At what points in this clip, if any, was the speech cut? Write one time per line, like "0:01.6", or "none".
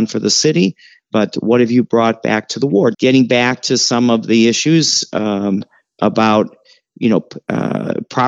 0:02.9